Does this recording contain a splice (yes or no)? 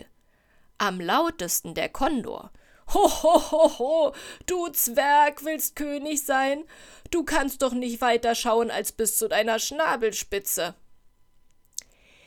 no